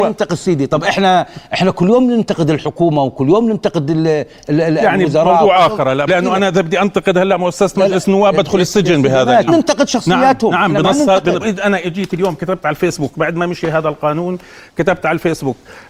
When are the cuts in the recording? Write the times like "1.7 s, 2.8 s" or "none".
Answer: 6.1 s, 9.5 s, 11.4 s

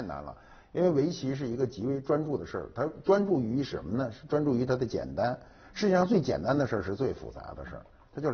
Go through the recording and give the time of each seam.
none

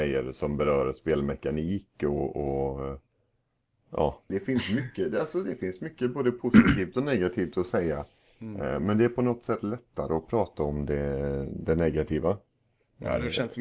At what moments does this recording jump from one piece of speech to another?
4.3 s

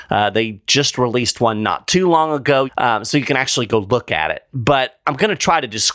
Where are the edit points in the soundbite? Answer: 2.7 s

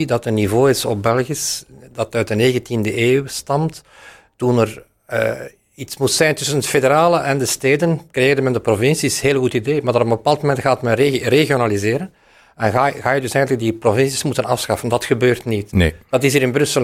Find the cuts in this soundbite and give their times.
none

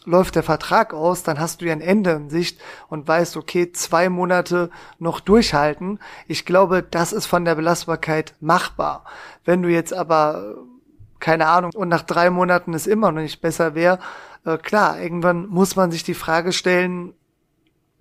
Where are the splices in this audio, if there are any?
11.7 s

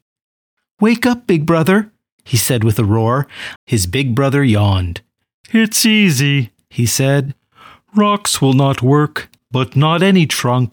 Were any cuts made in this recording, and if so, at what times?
3.6 s, 9.4 s

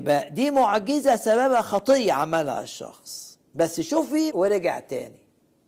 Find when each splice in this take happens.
4.3 s

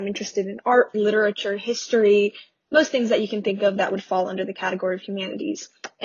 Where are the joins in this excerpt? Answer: 0.9 s

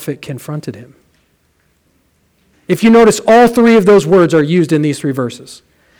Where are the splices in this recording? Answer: 2.5 s

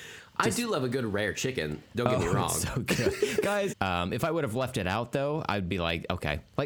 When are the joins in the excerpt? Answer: 3.7 s

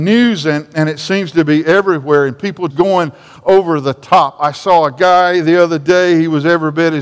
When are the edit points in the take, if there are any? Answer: 2.7 s

